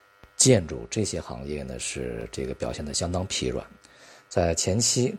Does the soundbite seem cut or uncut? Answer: uncut